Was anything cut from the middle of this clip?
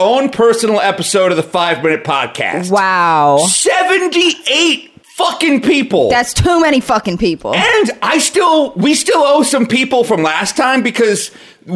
yes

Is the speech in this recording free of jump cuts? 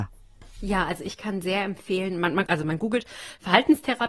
no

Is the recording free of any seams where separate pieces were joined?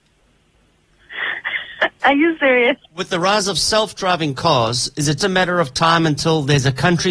no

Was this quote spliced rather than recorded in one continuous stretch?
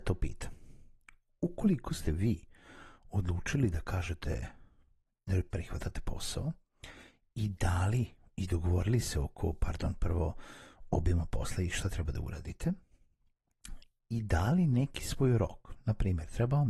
no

